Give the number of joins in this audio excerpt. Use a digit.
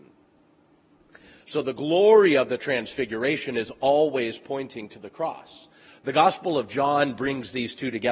0